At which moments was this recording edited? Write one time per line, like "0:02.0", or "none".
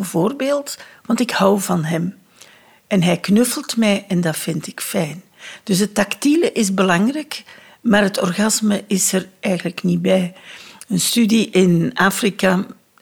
none